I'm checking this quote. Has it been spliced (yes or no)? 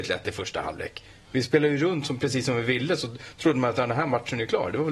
no